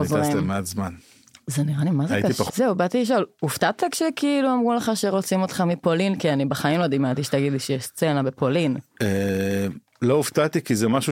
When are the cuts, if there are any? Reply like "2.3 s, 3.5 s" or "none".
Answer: 2.5 s